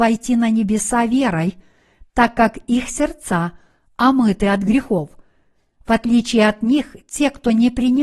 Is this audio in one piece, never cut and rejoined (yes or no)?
yes